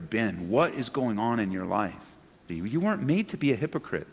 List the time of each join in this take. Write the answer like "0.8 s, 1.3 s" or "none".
2.5 s